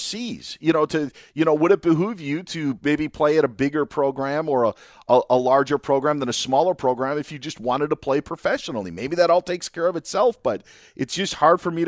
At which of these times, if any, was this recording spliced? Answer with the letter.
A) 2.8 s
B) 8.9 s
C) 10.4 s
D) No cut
D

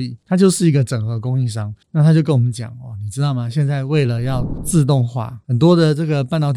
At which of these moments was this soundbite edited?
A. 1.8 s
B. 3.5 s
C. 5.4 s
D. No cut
A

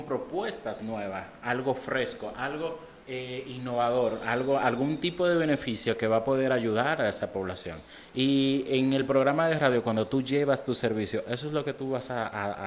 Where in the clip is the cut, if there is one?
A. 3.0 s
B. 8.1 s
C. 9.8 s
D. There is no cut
A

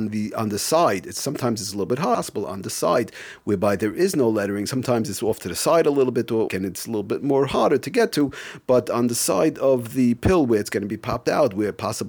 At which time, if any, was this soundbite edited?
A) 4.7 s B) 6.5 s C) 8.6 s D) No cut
B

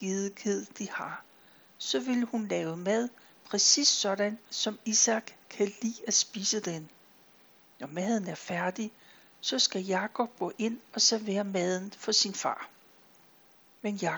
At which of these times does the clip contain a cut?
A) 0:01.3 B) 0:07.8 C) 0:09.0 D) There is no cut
D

